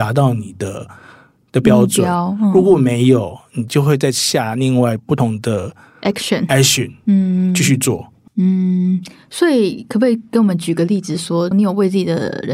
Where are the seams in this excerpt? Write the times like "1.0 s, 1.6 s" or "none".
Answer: 8.3 s, 11.5 s

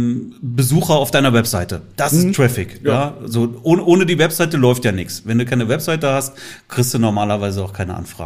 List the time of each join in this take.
none

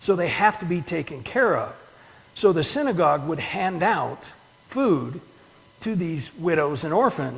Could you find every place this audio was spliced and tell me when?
none

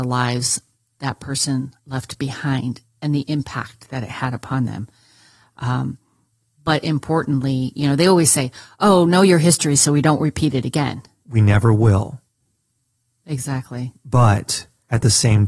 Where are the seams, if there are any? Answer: 11.2 s

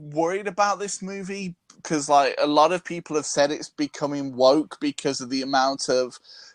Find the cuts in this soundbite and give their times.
none

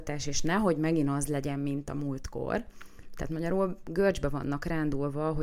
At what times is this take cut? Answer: none

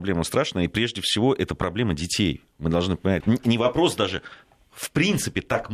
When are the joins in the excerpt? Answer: 3.2 s

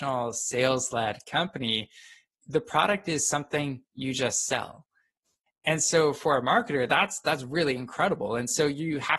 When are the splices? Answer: 5.5 s

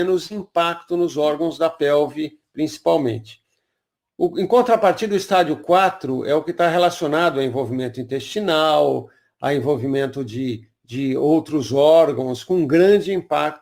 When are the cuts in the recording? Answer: none

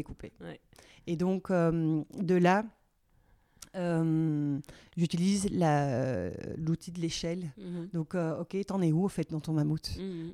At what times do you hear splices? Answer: none

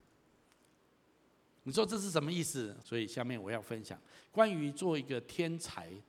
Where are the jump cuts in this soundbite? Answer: 2.8 s

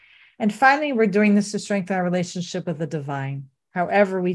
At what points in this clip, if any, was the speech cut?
none

